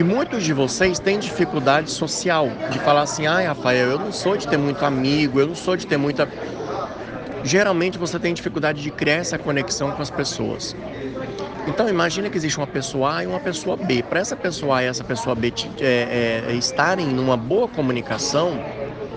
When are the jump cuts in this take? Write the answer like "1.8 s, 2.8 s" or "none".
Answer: none